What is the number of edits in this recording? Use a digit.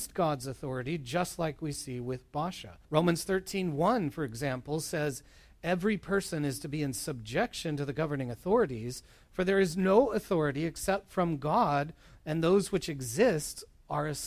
1